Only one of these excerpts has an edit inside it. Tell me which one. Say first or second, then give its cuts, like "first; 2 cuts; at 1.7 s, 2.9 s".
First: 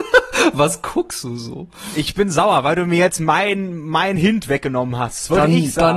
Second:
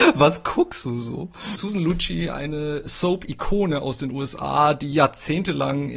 second; 1 cut; at 1.6 s